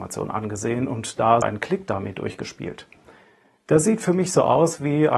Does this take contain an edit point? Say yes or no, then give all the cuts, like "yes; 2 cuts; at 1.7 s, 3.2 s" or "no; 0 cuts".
yes; 1 cut; at 1.4 s